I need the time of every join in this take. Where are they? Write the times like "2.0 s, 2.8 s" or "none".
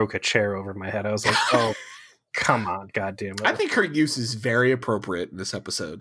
none